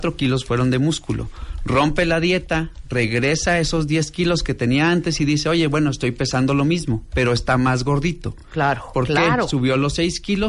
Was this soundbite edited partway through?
no; 0 cuts

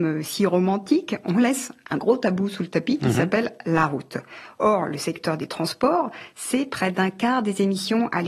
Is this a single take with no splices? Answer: yes; 0 cuts

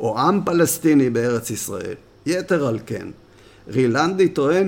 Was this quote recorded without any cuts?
yes; 0 cuts

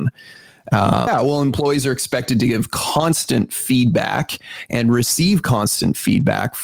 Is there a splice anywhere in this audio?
yes; 1 cut; at 1.1 s

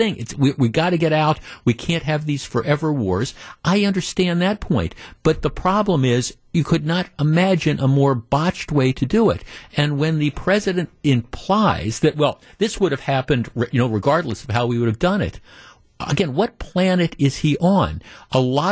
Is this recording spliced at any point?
no; 0 cuts

